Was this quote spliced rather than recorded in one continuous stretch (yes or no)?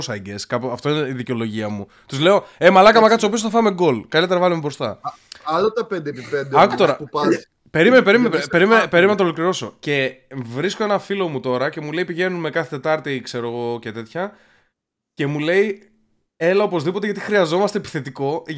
no